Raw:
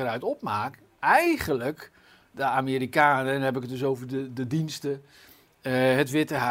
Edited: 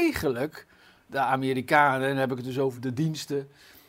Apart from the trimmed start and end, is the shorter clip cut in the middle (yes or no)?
yes